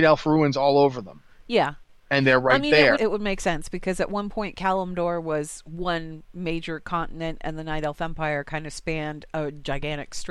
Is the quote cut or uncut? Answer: cut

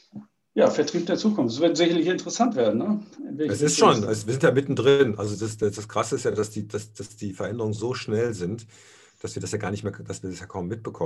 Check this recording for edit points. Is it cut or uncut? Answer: uncut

